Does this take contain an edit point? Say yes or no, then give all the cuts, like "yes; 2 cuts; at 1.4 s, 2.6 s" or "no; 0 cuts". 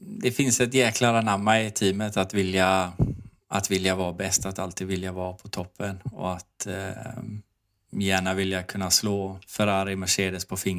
no; 0 cuts